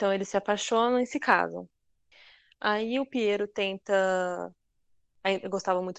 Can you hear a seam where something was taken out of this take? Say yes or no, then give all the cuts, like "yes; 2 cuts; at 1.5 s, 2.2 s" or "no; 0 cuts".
no; 0 cuts